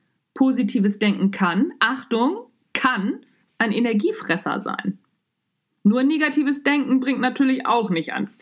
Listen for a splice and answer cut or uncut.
uncut